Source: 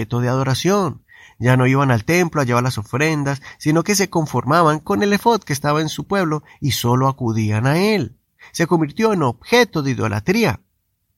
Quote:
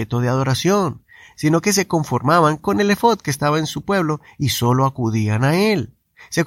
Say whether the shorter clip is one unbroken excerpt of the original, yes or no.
no